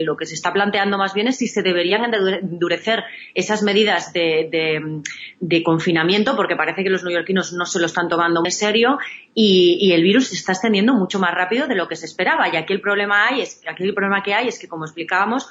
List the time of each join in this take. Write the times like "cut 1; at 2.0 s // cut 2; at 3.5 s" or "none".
cut 1; at 8.4 s

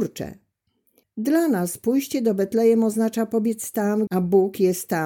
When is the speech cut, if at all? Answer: cut 1; at 1.0 s // cut 2; at 4.1 s

